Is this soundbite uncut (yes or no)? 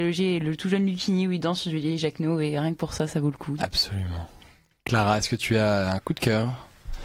no